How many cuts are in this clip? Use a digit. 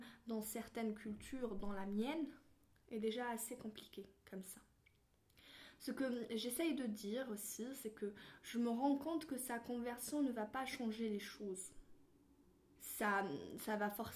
1